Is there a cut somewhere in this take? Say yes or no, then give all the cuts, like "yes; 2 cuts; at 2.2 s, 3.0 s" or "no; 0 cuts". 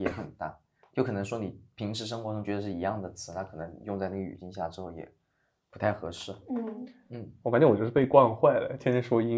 no; 0 cuts